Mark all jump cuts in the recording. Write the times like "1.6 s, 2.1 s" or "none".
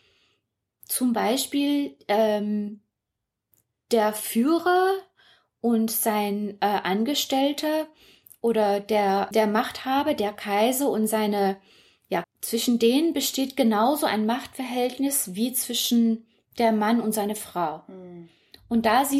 9.3 s, 12.2 s